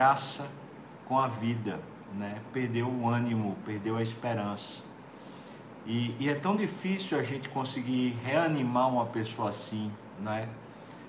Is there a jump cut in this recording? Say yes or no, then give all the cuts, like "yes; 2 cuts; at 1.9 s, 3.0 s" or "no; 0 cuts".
no; 0 cuts